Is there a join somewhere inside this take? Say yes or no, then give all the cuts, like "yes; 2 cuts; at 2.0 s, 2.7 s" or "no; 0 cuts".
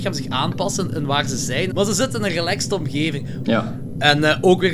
yes; 2 cuts; at 1.7 s, 3.4 s